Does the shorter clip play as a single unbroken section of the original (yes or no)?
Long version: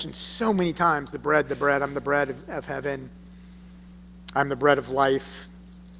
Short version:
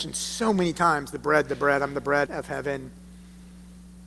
no